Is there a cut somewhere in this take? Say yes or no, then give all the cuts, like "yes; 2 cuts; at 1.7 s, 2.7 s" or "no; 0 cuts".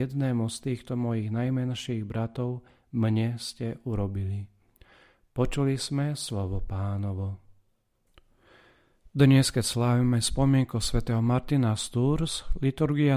no; 0 cuts